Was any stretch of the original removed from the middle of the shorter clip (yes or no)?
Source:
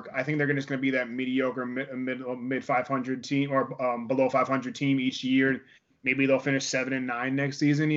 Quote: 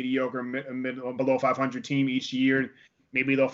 yes